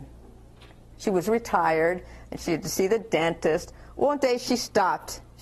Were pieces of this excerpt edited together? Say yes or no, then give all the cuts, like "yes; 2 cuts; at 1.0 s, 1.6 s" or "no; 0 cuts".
yes; 1 cut; at 0.9 s